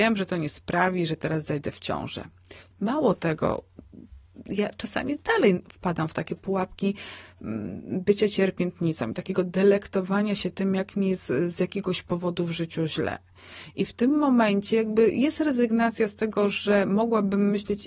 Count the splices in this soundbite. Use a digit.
1